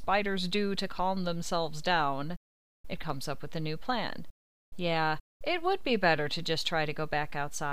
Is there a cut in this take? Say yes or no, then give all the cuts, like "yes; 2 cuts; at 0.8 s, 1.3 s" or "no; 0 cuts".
no; 0 cuts